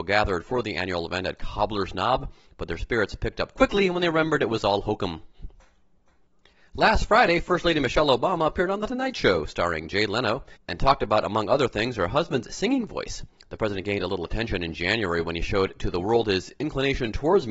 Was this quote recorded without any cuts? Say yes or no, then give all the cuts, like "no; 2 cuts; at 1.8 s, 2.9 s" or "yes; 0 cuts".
yes; 0 cuts